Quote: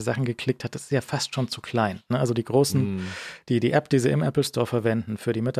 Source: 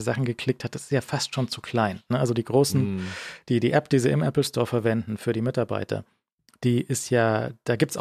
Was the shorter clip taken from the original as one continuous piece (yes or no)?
yes